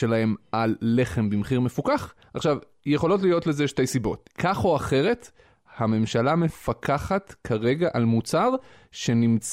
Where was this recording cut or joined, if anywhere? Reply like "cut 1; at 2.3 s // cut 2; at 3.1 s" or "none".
cut 1; at 4.3 s